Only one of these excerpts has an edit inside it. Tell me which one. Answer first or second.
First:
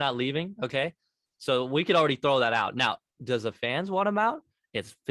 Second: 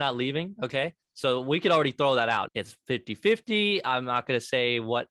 second